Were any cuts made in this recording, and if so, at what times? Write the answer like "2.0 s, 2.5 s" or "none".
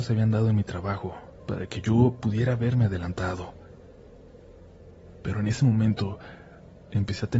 1.4 s